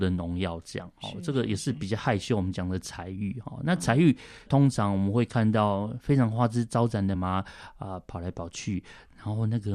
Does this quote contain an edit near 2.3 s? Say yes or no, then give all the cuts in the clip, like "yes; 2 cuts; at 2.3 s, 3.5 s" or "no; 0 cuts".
no; 2 cuts; at 4.5 s, 7.1 s